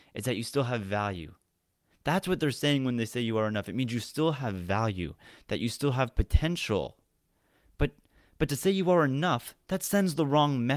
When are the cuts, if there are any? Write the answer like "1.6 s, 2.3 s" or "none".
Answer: 1.9 s